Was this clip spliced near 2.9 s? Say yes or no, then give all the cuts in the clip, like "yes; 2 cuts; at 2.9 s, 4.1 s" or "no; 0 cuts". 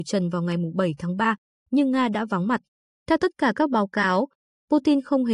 yes; 1 cut; at 2.9 s